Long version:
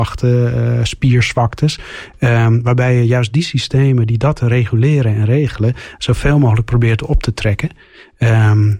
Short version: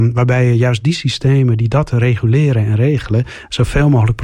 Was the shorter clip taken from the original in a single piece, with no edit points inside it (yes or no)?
yes